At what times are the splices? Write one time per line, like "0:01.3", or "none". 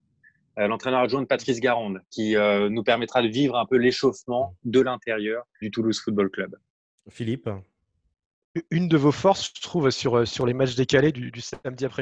0:05.6